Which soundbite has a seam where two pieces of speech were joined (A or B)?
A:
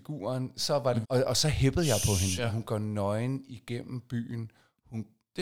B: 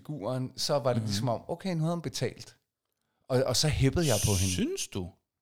A